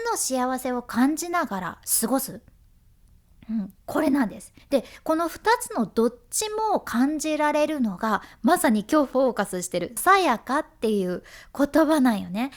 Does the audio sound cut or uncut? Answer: cut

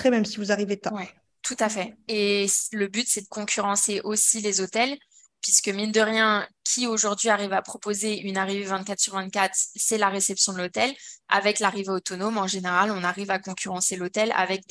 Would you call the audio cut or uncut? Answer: uncut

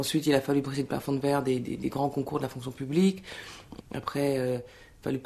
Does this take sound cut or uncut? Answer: cut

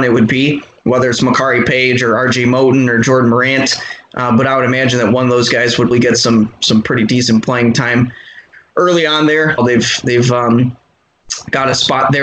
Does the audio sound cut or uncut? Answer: cut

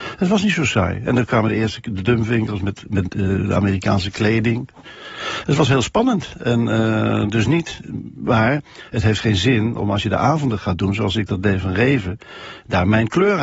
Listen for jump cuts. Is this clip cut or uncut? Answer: uncut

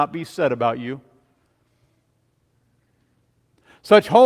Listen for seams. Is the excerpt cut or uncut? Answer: uncut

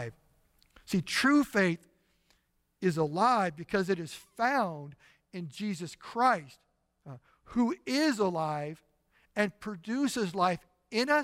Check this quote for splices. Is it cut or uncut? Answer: uncut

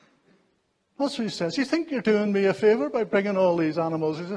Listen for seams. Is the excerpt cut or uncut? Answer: uncut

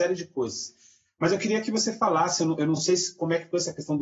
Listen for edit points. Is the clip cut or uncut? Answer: uncut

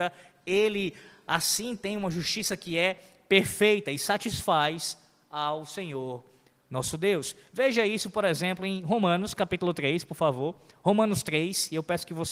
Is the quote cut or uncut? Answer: uncut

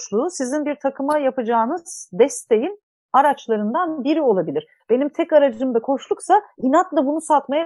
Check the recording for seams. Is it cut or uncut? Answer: cut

